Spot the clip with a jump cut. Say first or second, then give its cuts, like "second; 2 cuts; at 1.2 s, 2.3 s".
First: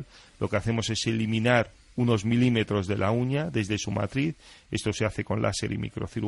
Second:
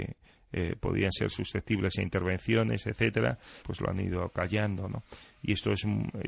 second; 1 cut; at 3.6 s